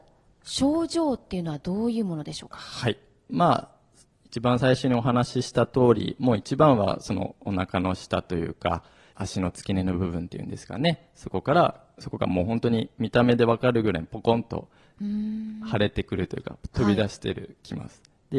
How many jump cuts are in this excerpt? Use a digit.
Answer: 2